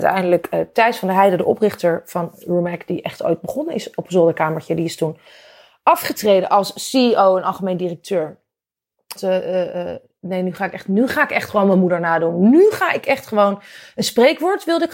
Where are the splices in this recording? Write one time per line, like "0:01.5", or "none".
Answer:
0:09.2